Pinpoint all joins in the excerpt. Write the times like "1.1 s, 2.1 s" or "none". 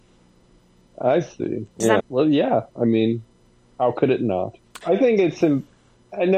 2.0 s, 4.8 s